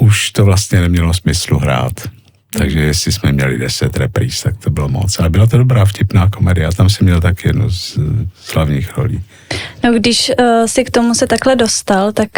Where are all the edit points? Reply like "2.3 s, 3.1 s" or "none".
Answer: none